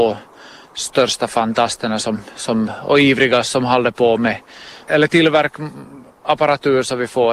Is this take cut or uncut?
cut